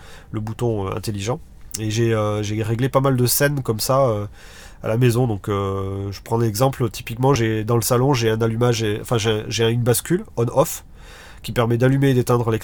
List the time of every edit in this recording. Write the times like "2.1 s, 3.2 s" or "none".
none